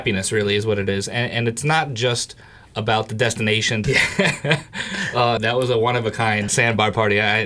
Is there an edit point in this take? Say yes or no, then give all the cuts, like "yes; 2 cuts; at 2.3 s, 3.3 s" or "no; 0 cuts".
yes; 3 cuts; at 3.8 s, 5.4 s, 6.5 s